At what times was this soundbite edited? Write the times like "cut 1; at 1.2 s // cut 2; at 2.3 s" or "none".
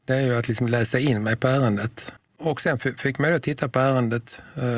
cut 1; at 2.2 s